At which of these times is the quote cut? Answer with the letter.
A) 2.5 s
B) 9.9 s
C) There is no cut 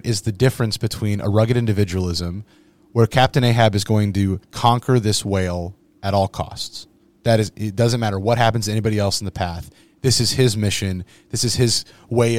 C